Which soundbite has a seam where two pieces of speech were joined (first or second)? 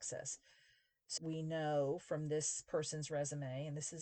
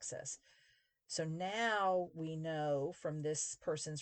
first